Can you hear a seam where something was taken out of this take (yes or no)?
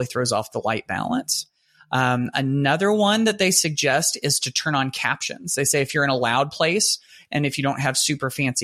no